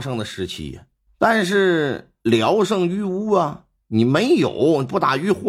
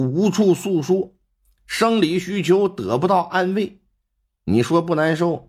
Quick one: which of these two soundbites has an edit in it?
first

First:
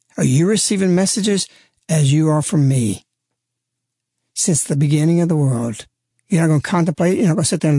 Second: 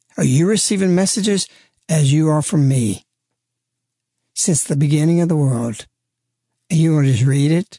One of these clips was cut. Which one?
first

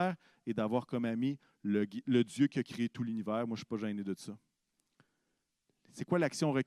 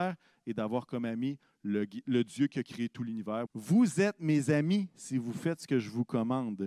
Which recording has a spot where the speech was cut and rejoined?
second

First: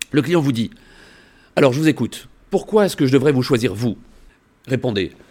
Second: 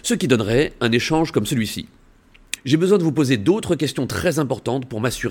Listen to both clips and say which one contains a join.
second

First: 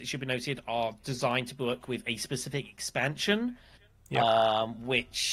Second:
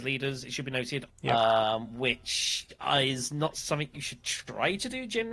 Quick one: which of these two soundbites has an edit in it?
second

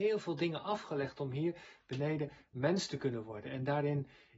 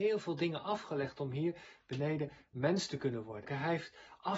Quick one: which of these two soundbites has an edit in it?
second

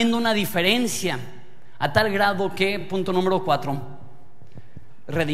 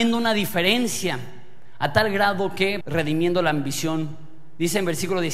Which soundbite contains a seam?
second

